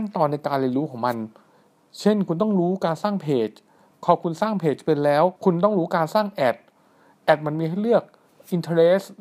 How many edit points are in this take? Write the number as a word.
one